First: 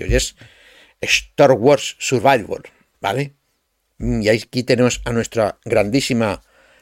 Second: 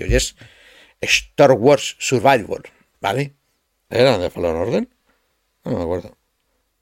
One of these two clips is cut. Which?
second; 1 cut; at 3.9 s

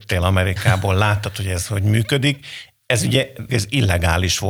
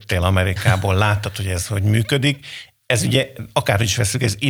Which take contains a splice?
first; 1 cut; at 3.5 s

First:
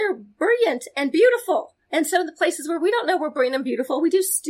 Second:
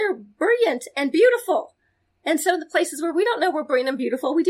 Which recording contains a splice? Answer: first; 1 cut; at 1.8 s

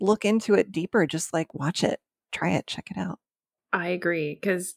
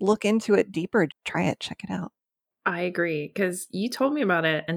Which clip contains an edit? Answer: second; 1 cut; at 1.1 s

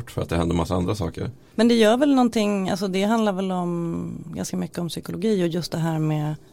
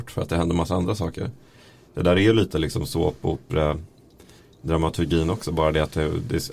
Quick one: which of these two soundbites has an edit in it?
first; 1 cut; at 1.5 s

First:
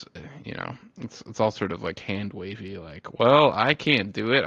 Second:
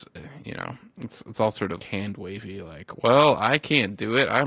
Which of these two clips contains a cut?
second; 1 cut; at 1.8 s

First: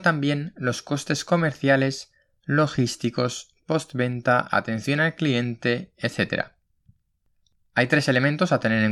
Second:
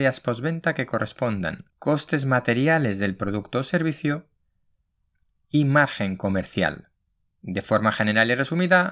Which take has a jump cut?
second; 2 cuts; at 1.7 s, 7.3 s

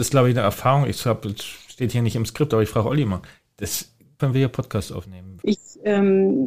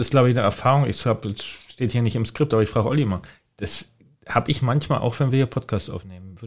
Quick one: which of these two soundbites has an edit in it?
first; 2 cuts; at 4.2 s, 5.4 s

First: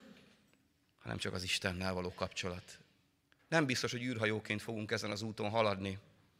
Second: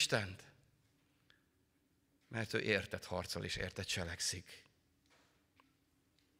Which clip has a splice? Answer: first; 1 cut; at 3.4 s

